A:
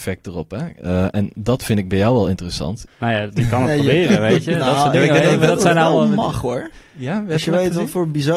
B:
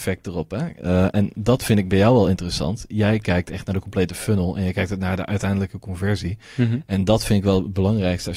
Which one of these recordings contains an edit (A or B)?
A